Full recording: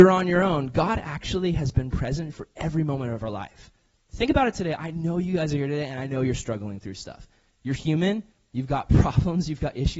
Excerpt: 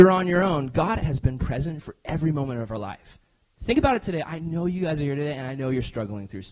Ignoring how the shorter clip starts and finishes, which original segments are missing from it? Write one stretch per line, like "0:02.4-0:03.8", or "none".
0:01.0-0:01.5